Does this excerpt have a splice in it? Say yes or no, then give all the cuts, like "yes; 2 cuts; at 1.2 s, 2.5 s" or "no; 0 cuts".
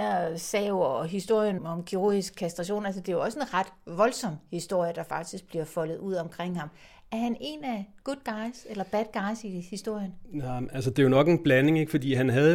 yes; 1 cut; at 1.6 s